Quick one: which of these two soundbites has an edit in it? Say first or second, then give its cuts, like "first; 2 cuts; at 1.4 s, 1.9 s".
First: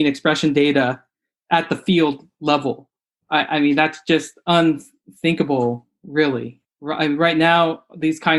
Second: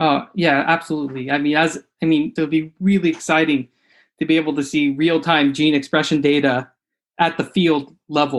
second; 1 cut; at 2.4 s